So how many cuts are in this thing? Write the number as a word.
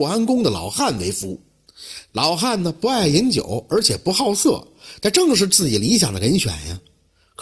one